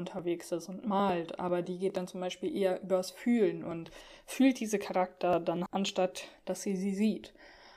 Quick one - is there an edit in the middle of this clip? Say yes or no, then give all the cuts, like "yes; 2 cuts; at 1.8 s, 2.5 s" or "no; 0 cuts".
yes; 1 cut; at 5.7 s